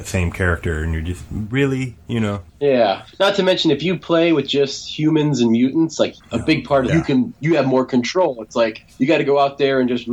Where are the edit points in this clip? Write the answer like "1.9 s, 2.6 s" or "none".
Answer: 6.9 s

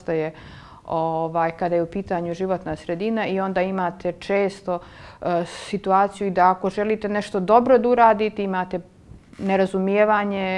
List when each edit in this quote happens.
none

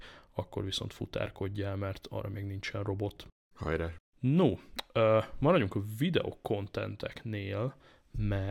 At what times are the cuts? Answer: none

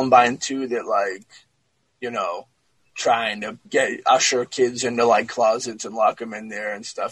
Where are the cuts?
3.6 s

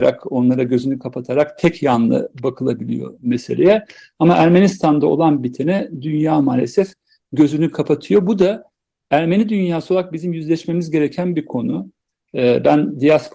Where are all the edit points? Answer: none

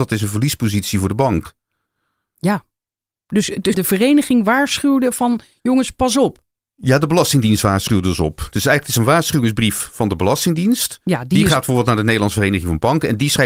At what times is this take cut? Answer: 3.7 s

